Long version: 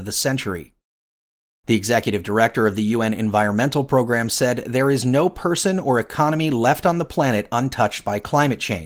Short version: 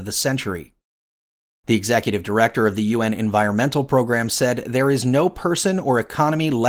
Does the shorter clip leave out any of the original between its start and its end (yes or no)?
no